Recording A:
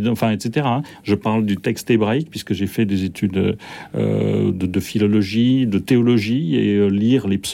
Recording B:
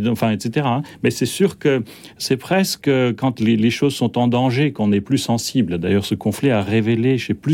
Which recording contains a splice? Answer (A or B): A